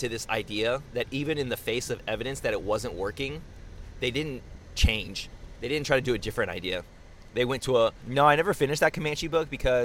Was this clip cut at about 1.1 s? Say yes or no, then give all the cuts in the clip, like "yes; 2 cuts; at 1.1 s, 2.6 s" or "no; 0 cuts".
no; 1 cut; at 8.0 s